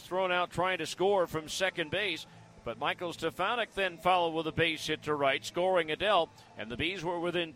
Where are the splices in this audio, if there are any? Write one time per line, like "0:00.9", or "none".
none